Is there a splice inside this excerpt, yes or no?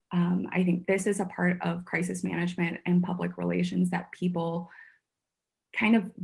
no